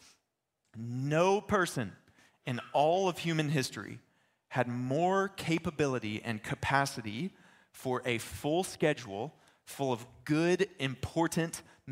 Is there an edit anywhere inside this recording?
no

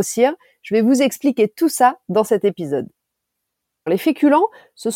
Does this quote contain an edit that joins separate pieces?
yes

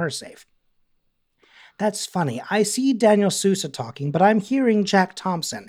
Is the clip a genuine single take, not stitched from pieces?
yes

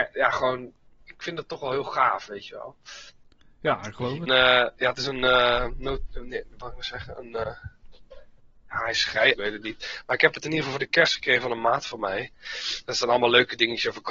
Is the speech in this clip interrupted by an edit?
yes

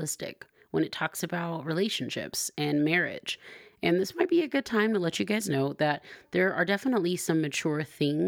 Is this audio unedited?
yes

